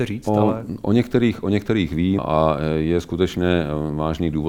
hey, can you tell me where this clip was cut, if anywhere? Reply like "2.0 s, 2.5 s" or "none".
2.2 s